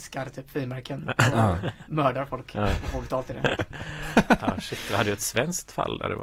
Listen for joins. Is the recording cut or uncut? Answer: uncut